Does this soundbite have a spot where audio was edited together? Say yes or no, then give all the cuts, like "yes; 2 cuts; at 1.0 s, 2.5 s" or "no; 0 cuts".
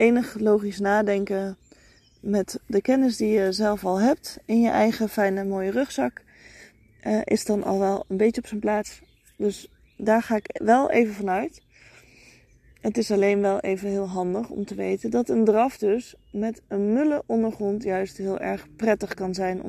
no; 0 cuts